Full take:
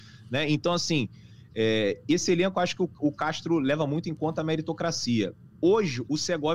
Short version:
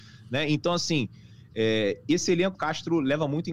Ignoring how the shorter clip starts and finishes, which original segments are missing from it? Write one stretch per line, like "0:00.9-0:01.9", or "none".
0:02.5-0:03.1